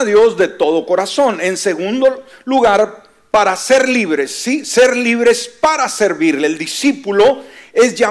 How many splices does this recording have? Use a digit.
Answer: 0